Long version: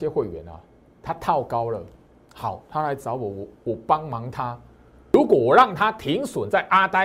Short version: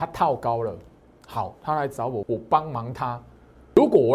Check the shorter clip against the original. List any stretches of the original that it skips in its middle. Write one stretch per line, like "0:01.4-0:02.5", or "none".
0:03.3-0:03.6